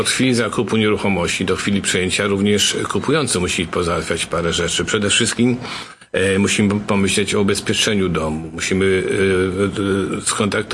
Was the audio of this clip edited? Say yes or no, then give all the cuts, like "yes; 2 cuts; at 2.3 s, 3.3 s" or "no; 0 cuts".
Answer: no; 0 cuts